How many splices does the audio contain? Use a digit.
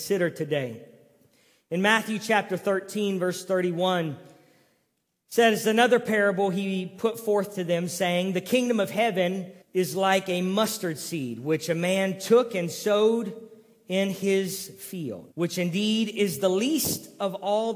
2